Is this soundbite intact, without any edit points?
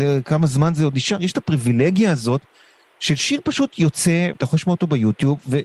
no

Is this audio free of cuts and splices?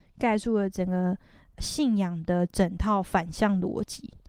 yes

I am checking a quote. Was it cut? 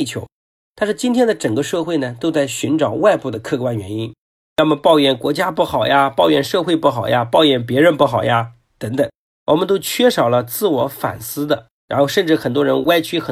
yes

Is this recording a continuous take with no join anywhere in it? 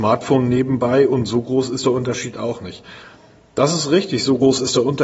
yes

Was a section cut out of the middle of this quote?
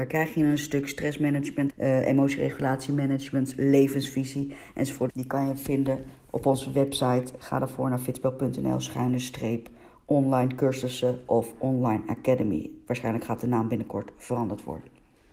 yes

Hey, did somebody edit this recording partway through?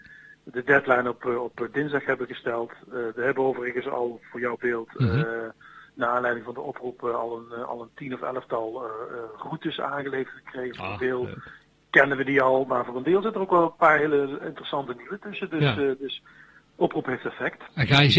no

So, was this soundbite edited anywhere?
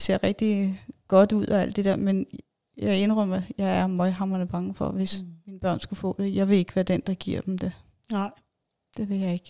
no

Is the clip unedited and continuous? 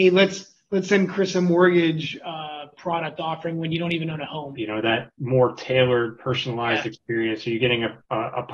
no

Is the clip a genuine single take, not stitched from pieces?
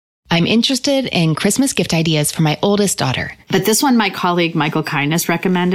no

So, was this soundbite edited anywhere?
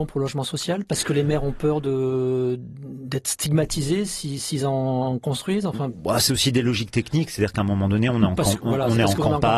no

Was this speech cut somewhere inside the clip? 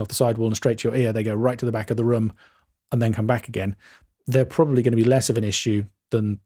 no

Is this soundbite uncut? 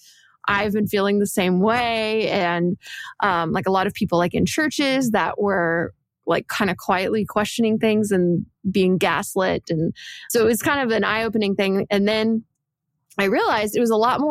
yes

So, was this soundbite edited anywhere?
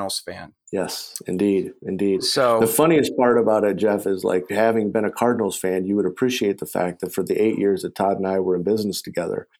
no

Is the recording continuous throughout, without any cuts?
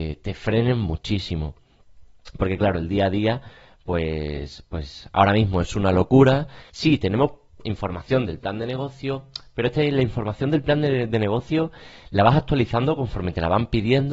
no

